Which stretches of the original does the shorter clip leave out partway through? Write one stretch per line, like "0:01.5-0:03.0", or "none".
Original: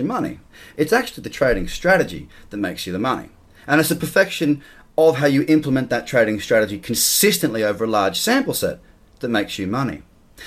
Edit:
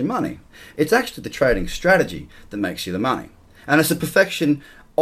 none